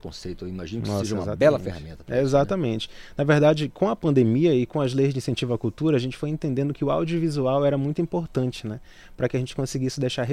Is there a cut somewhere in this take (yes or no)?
no